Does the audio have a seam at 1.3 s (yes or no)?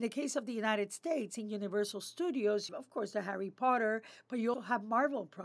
no